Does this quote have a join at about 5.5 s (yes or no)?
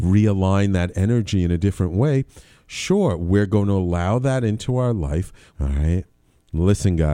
yes